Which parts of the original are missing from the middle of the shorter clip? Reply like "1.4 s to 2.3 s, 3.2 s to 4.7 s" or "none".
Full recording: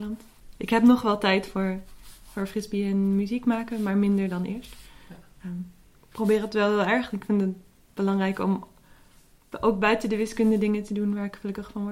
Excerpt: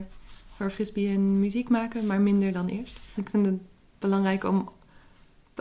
4.9 s to 7.1 s